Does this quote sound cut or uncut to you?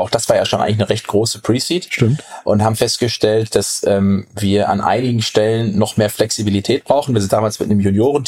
uncut